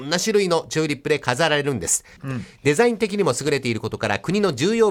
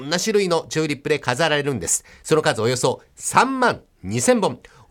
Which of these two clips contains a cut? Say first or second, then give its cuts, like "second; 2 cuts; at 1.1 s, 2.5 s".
first; 1 cut; at 2.2 s